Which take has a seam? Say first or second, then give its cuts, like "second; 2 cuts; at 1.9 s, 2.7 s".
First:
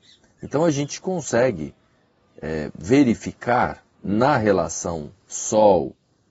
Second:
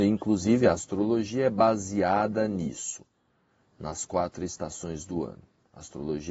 first; 1 cut; at 3.9 s